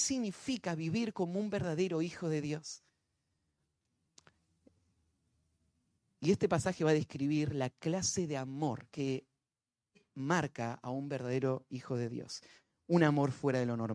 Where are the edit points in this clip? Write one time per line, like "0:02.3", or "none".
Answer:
0:08.9